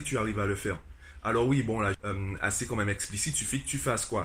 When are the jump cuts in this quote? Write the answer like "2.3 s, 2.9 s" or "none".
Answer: 1.9 s